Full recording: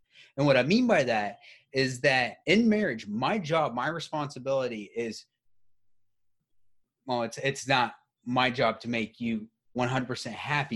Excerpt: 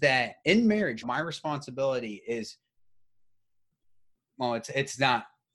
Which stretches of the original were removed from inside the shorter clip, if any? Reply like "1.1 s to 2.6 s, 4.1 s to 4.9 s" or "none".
3.0 s to 3.7 s